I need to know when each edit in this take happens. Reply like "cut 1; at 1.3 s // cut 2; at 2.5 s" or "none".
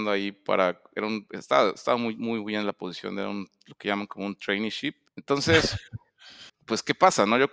cut 1; at 5.1 s // cut 2; at 6.5 s